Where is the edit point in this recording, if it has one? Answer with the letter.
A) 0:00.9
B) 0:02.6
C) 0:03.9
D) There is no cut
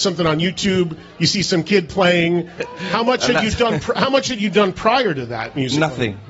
B